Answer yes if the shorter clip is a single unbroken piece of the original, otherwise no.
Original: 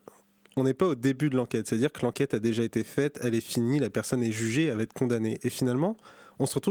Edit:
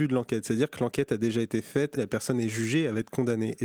no